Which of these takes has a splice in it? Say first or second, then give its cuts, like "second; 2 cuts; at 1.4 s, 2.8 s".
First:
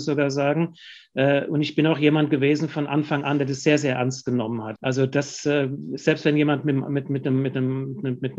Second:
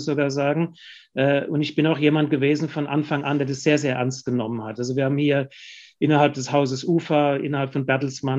first; 1 cut; at 4.8 s